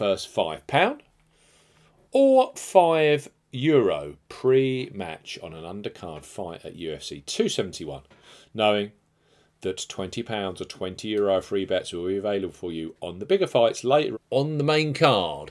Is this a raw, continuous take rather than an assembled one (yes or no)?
no